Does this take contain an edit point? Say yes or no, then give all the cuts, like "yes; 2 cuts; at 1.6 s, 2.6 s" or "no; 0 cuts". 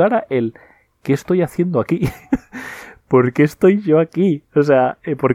no; 0 cuts